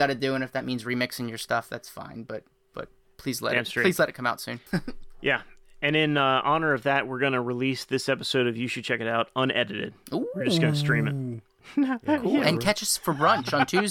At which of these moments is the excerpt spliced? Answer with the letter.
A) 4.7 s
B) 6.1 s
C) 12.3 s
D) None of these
A